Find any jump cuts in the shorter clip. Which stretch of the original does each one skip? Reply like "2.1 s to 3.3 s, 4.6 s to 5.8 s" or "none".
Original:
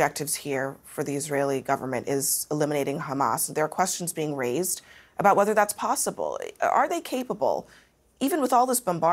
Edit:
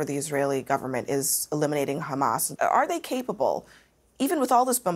3.5 s to 6.6 s